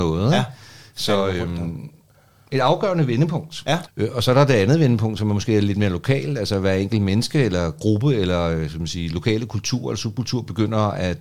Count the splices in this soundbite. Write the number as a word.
one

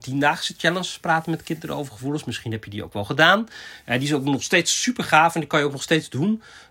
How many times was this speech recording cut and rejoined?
zero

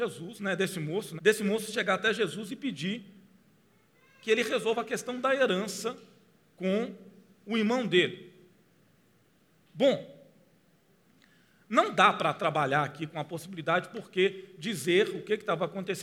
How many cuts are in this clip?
two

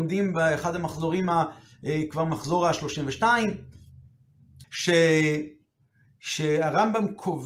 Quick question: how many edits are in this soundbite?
one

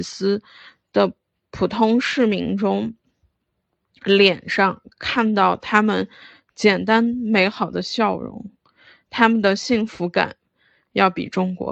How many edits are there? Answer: zero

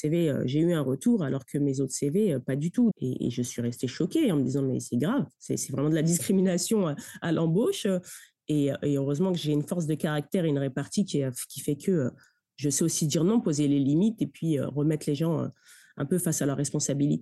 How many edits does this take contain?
one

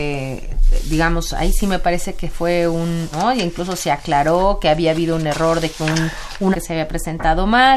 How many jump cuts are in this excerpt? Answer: two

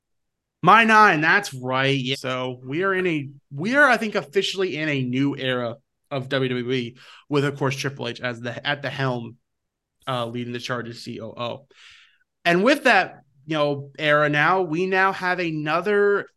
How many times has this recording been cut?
one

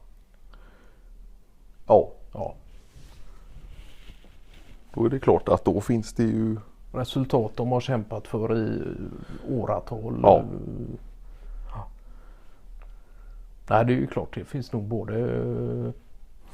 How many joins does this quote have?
one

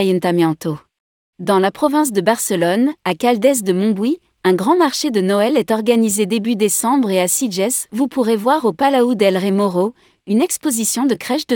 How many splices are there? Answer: one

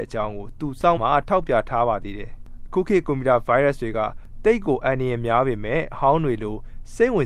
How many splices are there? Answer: one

